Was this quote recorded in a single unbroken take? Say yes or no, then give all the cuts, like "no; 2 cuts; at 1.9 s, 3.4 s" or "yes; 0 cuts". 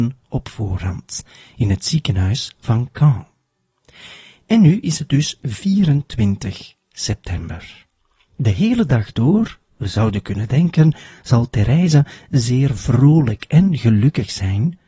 yes; 0 cuts